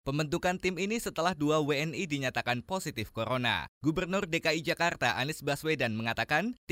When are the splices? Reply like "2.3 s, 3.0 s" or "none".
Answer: none